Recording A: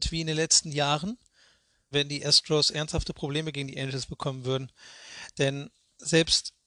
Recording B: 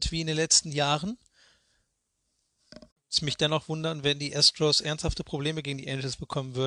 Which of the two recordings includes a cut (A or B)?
A